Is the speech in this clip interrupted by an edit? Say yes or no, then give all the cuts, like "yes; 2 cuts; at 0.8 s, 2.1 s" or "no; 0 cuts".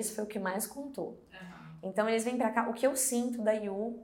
no; 0 cuts